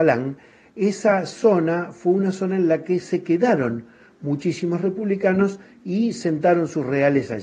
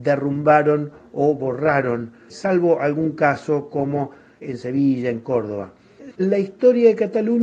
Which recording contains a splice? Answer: second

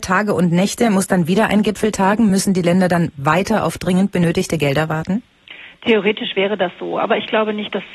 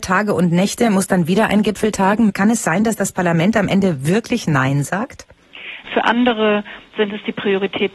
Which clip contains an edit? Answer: second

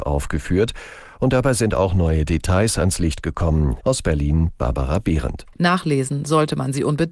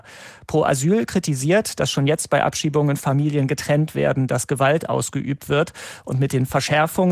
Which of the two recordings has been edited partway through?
first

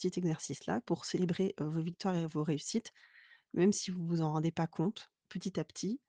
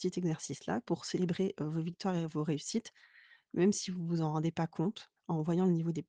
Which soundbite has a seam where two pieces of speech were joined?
second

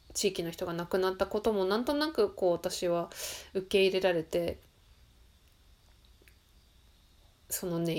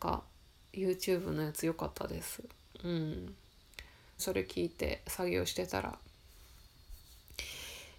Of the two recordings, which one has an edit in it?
second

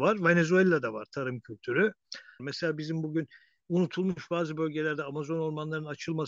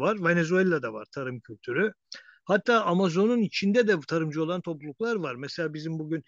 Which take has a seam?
first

